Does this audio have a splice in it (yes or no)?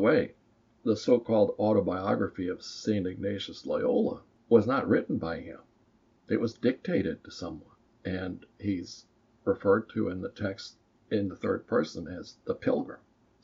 no